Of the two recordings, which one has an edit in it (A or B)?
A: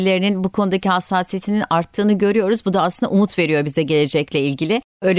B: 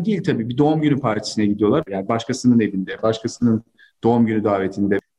B